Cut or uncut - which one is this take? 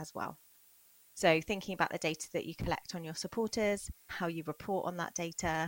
cut